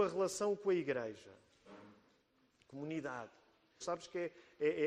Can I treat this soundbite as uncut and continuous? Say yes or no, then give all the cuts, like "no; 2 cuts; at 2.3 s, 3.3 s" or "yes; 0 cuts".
no; 1 cut; at 3.8 s